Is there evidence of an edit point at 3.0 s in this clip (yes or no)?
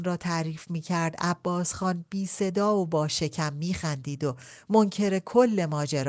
no